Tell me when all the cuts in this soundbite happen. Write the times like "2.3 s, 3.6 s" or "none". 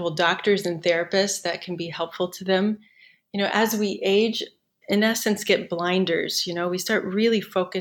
4.8 s